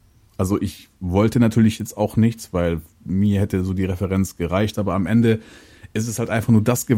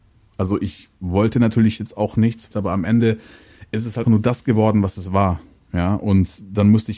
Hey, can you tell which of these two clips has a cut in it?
second; 2 cuts; at 2.5 s, 4.0 s

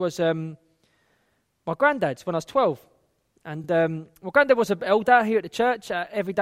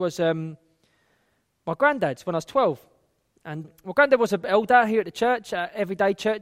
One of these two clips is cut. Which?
second; 1 cut; at 3.6 s

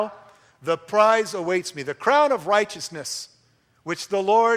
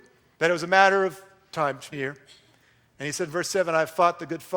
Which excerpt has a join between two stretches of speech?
second; 1 cut; at 1.9 s

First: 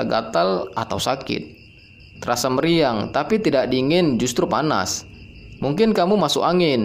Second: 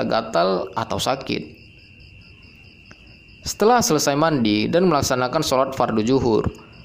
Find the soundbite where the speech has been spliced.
first; 2 cuts; at 2.1 s, 5.6 s

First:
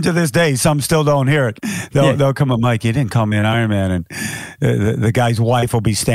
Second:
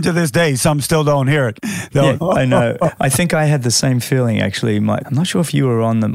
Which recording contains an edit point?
second; 2 cuts; at 2.2 s, 5.0 s

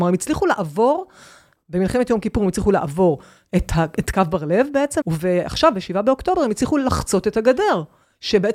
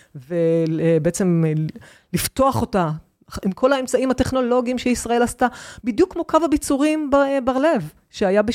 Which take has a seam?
first; 2 cuts; at 3.9 s, 5.0 s

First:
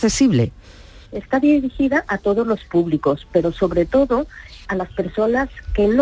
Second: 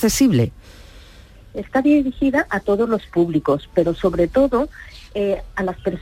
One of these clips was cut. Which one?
first; 2 cuts; at 1.0 s, 4.6 s

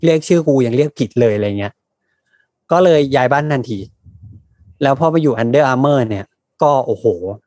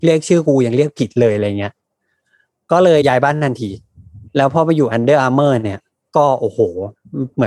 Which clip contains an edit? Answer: second; 2 cuts; at 3.0 s, 4.3 s

